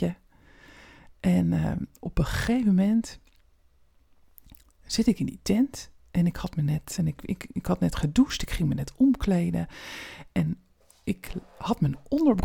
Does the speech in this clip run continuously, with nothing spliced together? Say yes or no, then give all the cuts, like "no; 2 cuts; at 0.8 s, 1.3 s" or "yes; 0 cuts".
no; 1 cut; at 7.0 s